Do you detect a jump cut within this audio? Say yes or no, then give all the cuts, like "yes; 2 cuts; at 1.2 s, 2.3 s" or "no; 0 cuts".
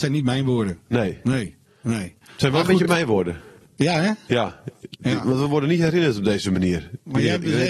no; 0 cuts